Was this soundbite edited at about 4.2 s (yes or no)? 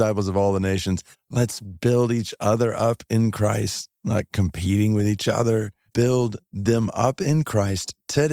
no